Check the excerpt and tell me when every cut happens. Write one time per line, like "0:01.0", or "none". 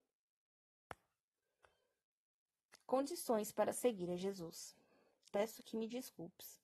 0:05.3